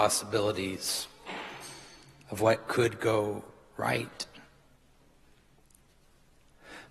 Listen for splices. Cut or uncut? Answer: uncut